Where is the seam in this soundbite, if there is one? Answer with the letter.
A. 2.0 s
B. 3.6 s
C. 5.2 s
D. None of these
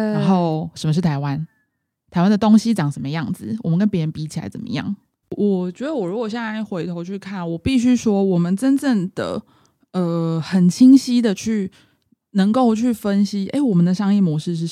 C